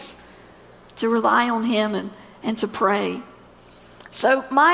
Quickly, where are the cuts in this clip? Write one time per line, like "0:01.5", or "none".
none